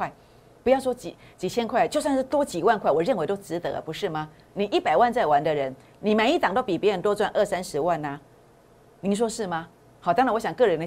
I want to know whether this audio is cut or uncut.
uncut